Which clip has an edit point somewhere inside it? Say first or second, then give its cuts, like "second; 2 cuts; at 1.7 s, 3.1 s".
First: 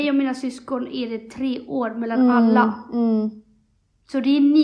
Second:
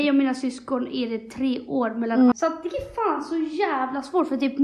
second; 1 cut; at 2.3 s